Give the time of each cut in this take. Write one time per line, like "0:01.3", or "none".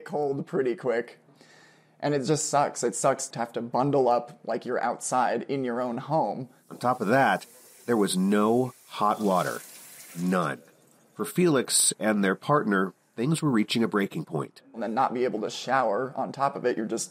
none